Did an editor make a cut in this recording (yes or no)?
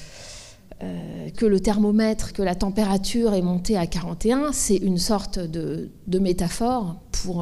yes